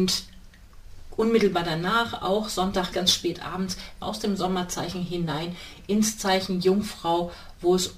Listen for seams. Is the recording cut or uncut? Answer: cut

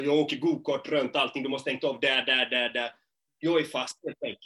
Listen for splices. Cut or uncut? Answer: uncut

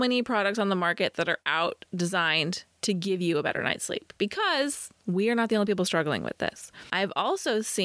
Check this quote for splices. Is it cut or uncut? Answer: cut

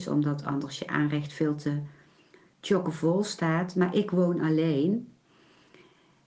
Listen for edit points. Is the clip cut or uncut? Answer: uncut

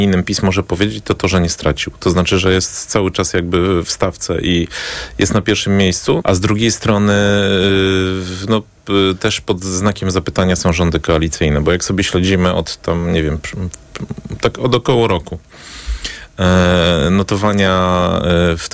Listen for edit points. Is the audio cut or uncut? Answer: cut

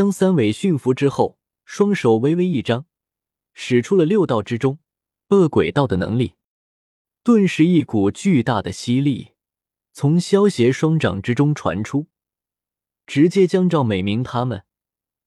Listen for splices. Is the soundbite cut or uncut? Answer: uncut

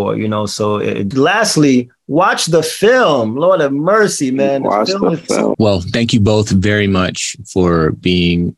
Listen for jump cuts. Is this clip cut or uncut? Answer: cut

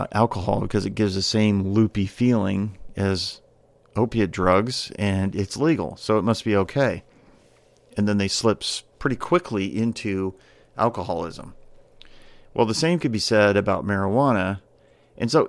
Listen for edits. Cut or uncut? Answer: uncut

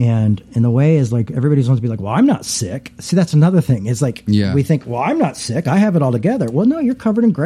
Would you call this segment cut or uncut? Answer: uncut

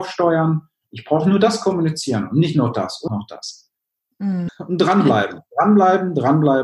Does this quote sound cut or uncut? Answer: cut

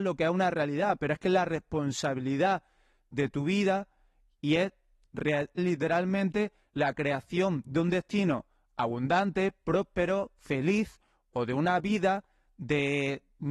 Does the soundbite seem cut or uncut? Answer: cut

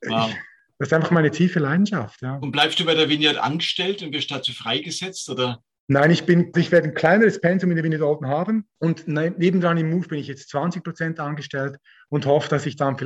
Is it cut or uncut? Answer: cut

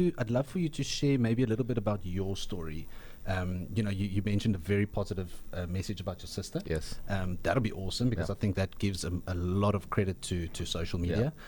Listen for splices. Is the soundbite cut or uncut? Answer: uncut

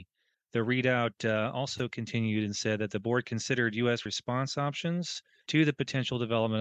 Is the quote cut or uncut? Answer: uncut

